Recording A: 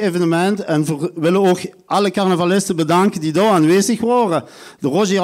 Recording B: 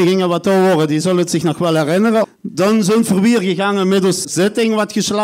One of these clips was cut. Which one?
B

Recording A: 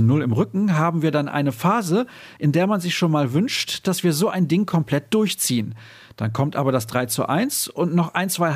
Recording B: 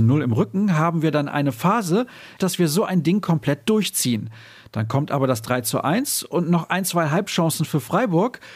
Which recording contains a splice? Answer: B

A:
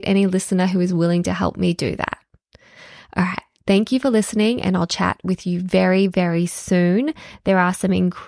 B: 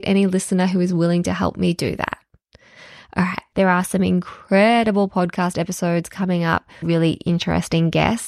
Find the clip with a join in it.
B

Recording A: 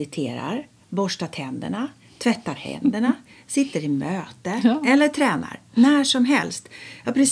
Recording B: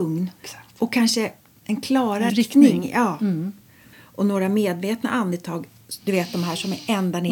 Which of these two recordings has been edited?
B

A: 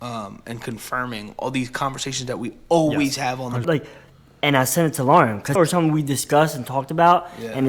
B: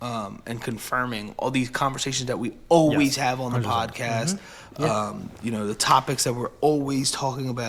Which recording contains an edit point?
A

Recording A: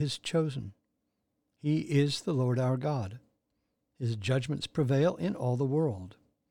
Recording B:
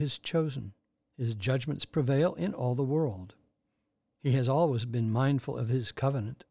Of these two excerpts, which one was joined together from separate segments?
B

